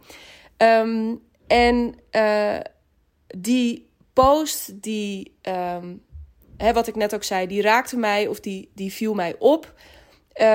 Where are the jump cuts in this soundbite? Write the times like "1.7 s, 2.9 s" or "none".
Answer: none

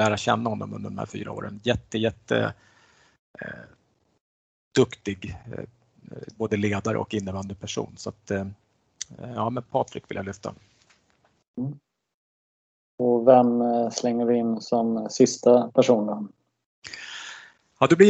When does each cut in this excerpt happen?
none

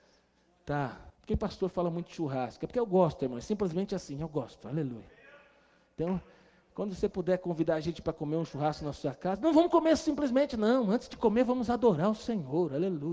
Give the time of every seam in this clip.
1.1 s

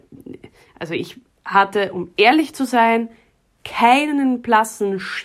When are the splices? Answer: none

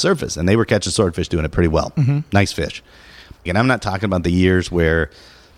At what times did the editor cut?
3.5 s

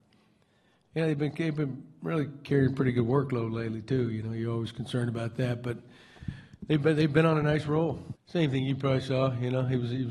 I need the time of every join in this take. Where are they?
8.1 s

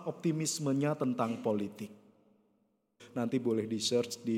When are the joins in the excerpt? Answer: 3.0 s

